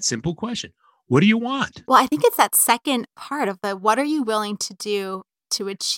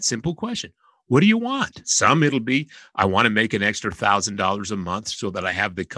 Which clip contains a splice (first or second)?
first